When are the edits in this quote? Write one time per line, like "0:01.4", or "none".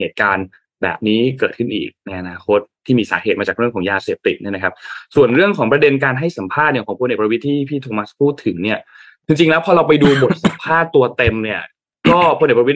none